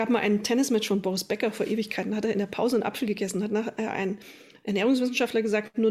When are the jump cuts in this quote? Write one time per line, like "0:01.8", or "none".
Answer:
none